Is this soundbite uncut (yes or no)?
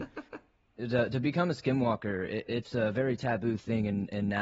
yes